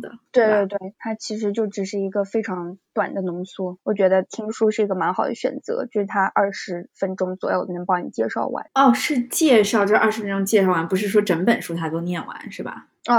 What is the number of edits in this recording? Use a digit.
1